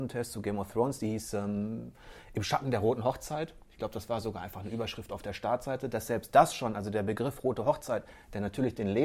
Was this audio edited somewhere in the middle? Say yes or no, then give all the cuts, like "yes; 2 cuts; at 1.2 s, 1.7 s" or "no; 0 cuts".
no; 0 cuts